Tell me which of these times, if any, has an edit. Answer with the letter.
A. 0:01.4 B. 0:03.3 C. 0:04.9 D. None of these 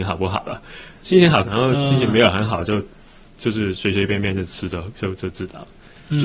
A